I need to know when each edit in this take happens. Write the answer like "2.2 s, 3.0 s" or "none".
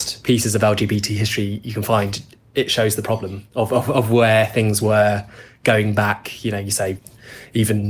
none